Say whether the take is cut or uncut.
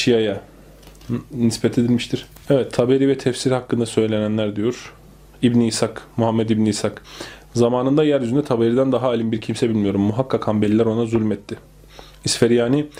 uncut